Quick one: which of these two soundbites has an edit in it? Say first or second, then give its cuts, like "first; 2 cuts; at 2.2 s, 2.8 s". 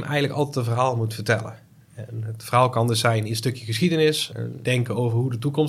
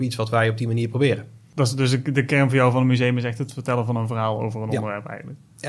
first; 1 cut; at 4.6 s